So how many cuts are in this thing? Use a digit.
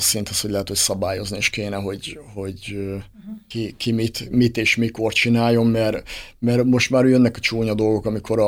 0